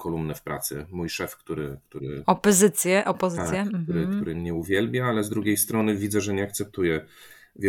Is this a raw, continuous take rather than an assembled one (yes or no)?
yes